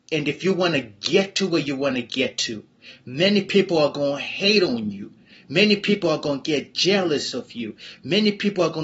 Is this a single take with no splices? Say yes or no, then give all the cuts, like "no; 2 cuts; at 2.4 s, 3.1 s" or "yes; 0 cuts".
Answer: yes; 0 cuts